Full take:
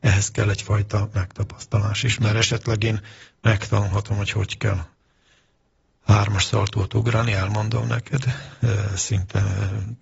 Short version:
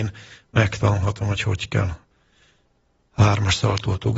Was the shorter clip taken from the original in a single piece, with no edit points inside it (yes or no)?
yes